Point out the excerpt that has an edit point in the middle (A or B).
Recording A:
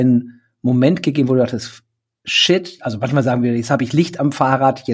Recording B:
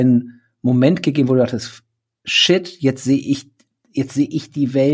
A